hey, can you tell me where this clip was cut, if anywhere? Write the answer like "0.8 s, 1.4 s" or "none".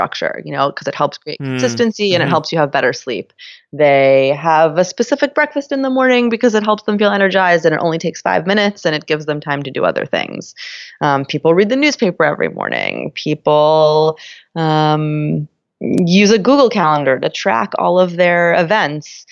none

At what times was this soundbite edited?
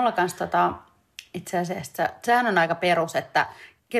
none

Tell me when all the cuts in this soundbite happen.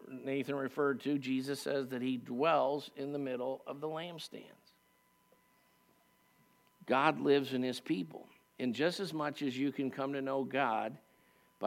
none

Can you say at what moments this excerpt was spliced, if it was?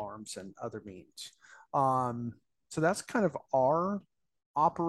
none

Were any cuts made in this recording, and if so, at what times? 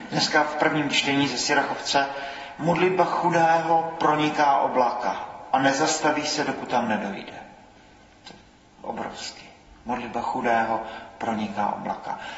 none

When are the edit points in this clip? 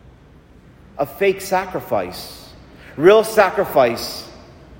none

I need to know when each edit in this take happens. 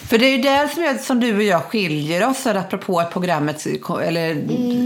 none

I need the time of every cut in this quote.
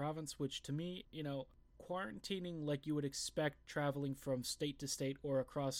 1.0 s

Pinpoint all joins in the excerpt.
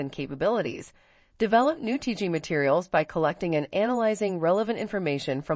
none

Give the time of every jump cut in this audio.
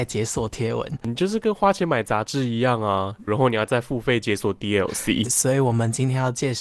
3.3 s, 5.3 s

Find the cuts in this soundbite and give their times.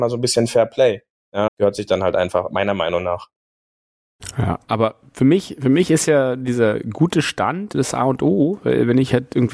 1.5 s, 7.7 s

